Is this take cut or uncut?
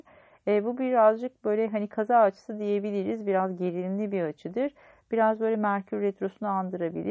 uncut